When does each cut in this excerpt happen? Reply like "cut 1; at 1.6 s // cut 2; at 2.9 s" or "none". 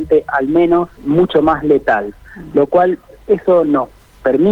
cut 1; at 1.0 s